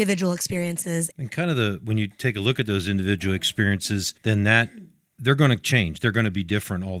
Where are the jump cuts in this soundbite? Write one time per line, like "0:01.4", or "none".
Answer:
0:04.2